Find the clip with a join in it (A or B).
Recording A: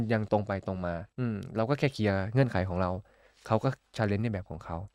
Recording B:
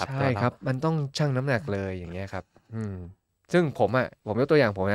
A